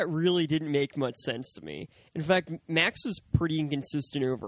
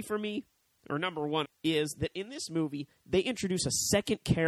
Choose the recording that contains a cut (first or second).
second